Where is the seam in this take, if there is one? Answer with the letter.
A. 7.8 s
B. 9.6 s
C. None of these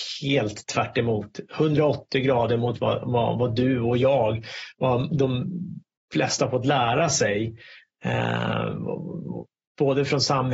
C